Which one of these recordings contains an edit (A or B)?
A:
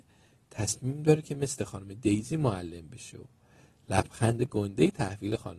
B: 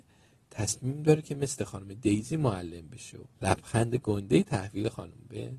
B